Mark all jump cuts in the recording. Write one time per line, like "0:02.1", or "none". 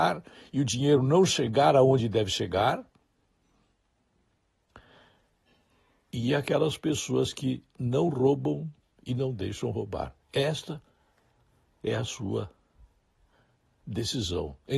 none